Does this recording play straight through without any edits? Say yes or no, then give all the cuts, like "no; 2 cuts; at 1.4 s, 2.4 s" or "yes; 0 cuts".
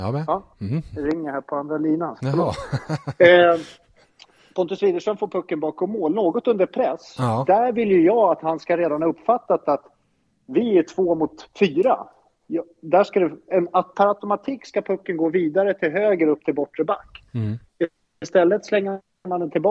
yes; 0 cuts